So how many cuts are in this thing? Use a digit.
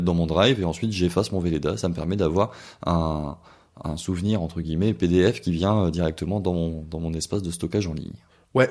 0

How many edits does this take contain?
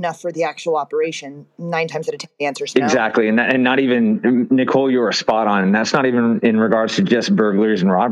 0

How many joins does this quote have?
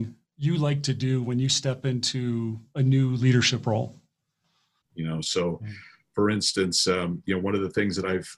1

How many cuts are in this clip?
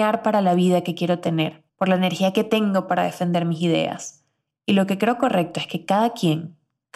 2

